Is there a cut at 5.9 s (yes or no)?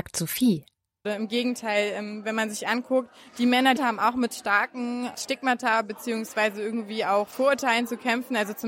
no